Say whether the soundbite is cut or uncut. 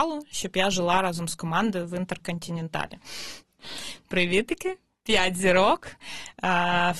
uncut